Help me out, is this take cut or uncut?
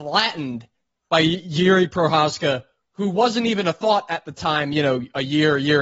uncut